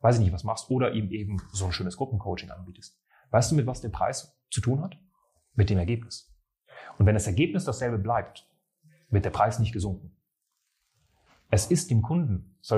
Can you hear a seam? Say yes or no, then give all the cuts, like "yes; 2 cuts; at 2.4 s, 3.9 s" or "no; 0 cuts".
no; 0 cuts